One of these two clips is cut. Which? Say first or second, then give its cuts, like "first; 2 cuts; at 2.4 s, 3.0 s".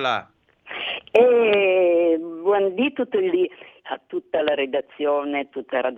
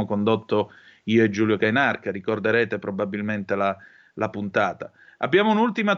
first; 1 cut; at 3.8 s